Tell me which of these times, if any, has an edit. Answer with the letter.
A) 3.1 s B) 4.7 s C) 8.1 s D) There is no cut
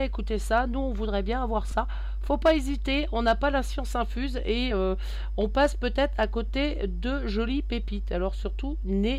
D